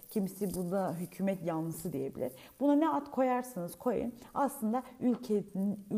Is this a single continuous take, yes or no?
yes